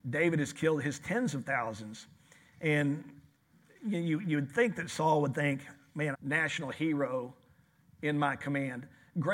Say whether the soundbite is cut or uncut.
cut